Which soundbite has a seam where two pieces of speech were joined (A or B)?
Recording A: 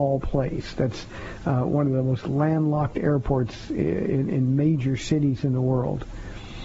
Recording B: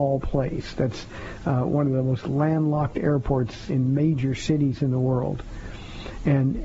B